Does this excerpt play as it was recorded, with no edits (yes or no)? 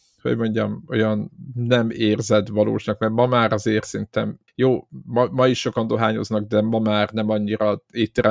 no